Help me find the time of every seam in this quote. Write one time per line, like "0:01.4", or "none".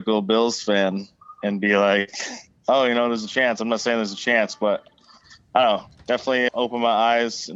0:06.5